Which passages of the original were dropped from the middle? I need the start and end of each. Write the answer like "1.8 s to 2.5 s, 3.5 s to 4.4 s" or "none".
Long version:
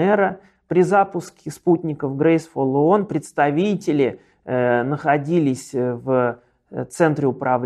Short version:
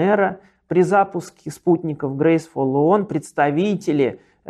none